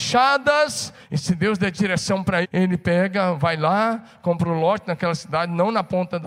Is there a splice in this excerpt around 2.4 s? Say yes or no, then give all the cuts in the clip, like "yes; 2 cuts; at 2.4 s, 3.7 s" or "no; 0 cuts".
yes; 2 cuts; at 1.0 s, 2.4 s